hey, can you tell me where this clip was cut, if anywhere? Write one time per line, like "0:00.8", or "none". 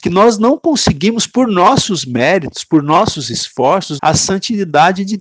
0:04.0

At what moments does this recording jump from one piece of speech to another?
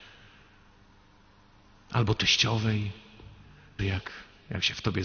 0:03.8

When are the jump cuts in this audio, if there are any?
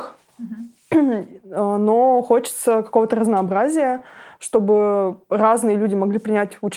none

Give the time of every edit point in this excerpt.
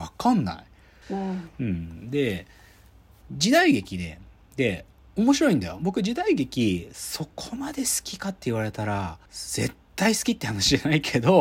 0:01.0
0:09.3

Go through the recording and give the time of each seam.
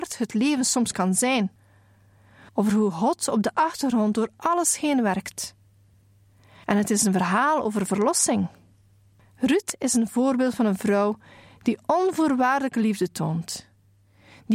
0:02.5

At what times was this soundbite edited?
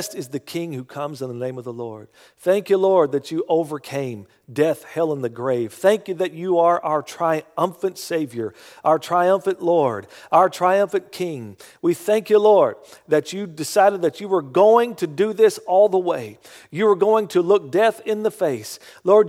none

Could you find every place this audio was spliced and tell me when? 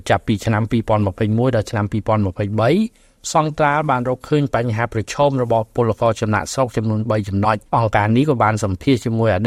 0:07.7

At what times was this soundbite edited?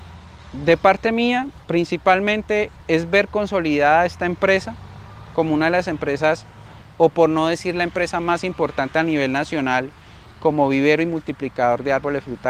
0:01.6
0:02.8

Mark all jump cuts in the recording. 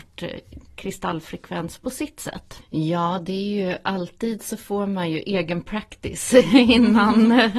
0:02.6

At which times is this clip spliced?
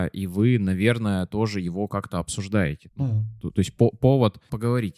0:02.9

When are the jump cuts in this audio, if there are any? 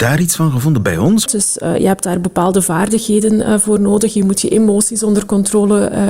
0:01.3

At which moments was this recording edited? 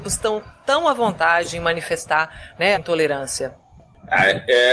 0:02.7

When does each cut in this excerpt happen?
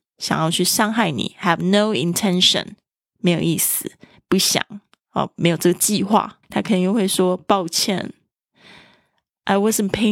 0:04.2
0:06.4

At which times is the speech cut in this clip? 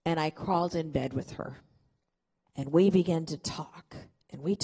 0:02.5

